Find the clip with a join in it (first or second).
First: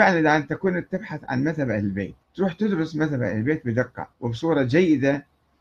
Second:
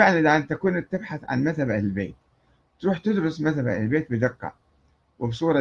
first